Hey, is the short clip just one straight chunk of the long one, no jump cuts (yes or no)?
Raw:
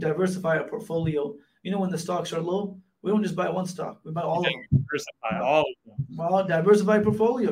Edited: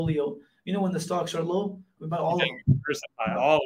no